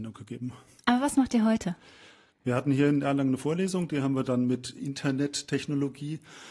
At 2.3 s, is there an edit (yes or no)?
yes